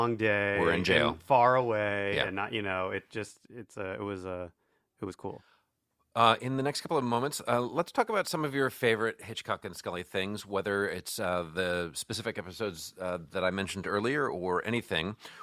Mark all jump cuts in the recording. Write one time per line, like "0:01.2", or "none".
none

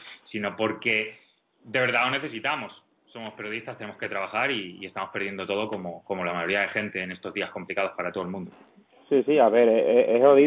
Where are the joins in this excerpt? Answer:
none

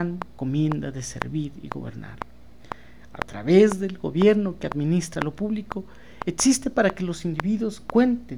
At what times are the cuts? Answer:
0:06.2

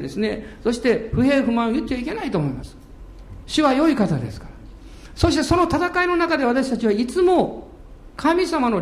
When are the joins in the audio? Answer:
0:03.4

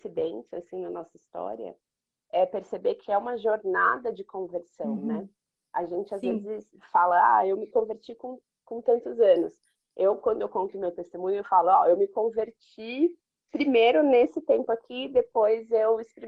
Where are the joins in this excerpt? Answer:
none

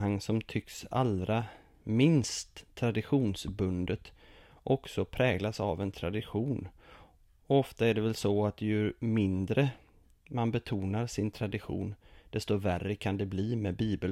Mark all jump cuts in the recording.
none

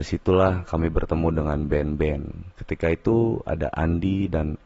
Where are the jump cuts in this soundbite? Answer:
0:02.5

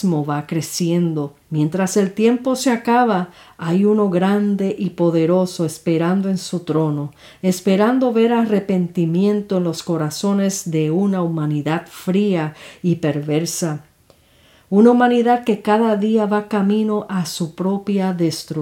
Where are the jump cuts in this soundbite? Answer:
0:01.4

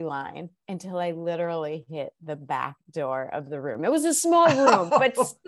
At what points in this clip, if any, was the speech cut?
none

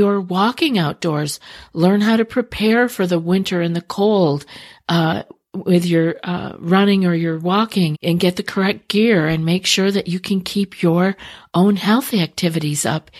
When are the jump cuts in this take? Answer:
0:07.9

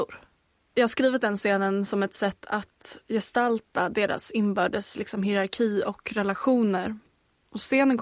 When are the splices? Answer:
none

